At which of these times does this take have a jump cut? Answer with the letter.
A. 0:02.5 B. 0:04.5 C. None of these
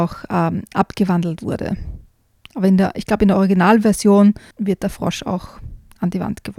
B